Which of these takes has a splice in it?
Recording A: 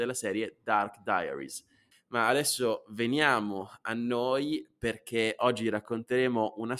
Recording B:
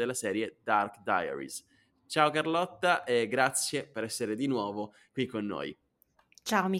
A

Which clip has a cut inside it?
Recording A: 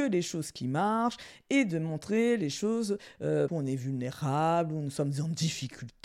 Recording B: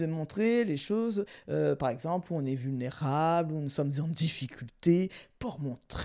A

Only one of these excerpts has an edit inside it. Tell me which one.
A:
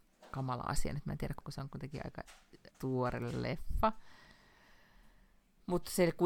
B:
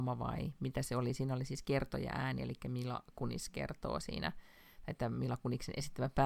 A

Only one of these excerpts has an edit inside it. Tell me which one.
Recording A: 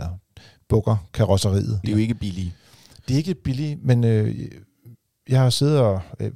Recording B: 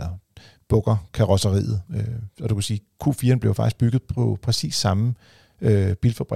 A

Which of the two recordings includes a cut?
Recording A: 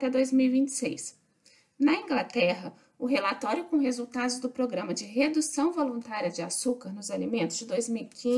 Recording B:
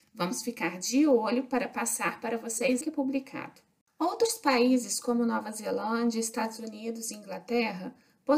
B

